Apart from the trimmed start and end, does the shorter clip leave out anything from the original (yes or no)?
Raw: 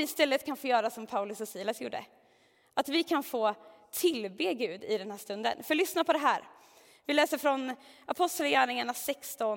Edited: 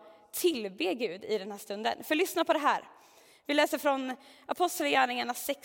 no